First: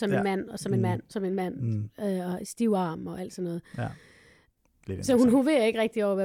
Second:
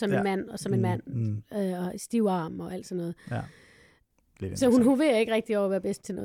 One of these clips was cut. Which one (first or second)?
second